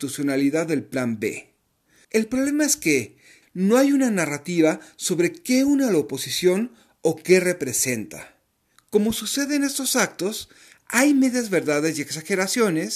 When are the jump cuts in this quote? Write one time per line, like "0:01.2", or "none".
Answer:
0:02.0
0:03.4
0:08.7